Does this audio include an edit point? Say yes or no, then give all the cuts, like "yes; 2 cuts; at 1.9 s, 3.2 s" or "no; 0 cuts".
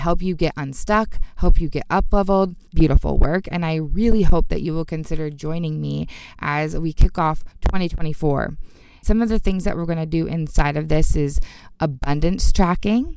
yes; 2 cuts; at 2.7 s, 9.0 s